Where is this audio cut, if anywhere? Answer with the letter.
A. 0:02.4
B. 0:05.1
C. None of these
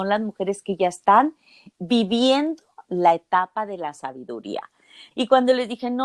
B